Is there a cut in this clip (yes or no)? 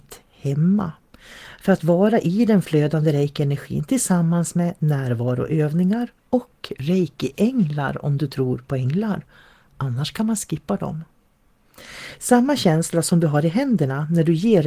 yes